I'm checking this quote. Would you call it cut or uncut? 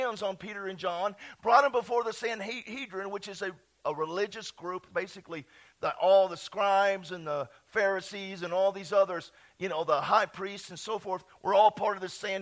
uncut